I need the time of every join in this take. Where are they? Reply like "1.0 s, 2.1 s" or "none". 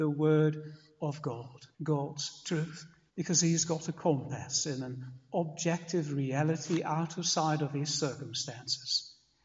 1.7 s, 3.1 s